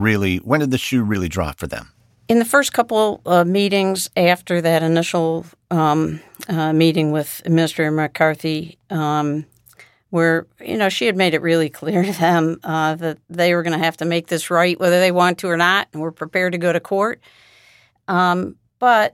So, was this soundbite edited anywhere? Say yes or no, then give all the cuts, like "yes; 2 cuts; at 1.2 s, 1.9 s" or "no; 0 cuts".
no; 0 cuts